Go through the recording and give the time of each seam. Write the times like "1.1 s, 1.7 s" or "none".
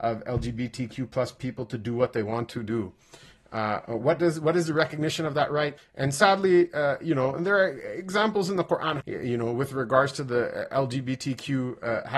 5.8 s, 9.0 s